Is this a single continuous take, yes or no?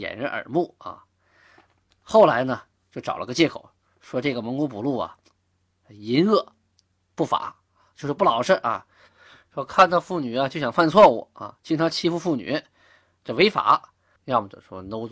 no